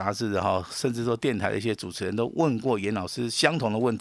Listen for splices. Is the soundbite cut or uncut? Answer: uncut